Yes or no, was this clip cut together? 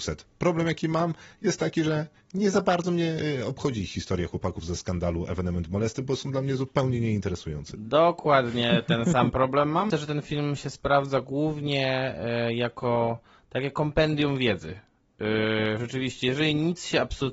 yes